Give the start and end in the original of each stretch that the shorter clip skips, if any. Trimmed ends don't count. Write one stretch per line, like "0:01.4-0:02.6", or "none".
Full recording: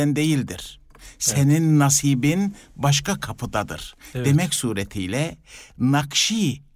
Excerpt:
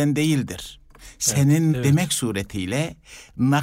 0:01.7-0:04.1

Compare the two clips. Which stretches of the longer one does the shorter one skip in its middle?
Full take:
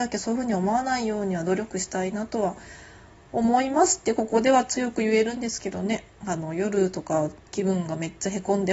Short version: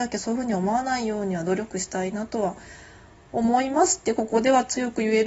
none

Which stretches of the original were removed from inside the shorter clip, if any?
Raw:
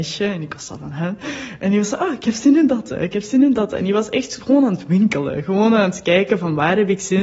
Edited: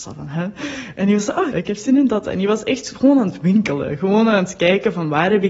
0:02.1-0:03.0

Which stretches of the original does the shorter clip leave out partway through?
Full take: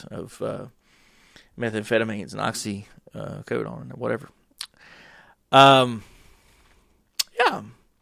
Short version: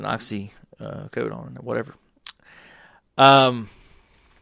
none

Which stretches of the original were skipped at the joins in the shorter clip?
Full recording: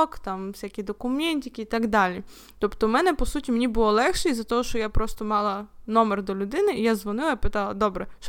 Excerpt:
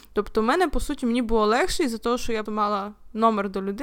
0:04.9-0:05.2

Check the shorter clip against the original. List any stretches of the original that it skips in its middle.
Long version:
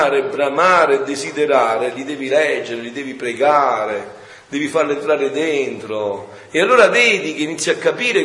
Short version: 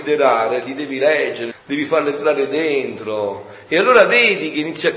0:02.8-0:04.3

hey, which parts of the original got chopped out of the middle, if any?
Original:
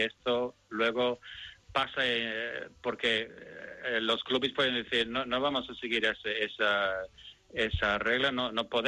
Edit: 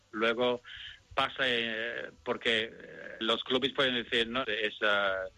0:03.8-0:04.0
0:05.2-0:06.2

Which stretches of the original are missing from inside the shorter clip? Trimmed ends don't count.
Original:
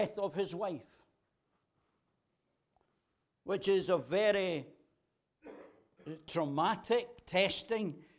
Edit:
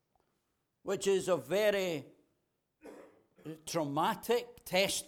none

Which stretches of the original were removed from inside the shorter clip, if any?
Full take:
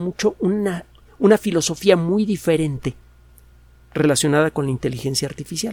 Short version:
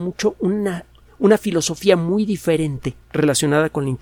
0:03.0-0:03.9

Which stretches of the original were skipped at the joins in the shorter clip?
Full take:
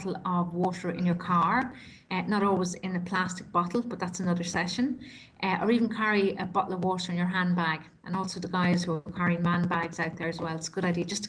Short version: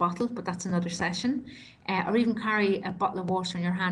none

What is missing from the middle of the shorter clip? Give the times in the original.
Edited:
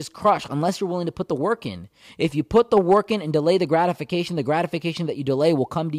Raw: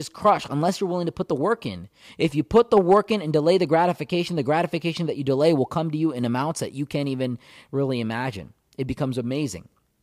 none

